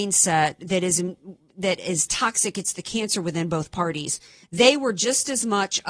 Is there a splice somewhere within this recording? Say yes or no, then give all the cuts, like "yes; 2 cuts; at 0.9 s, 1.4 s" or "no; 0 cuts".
yes; 1 cut; at 4.4 s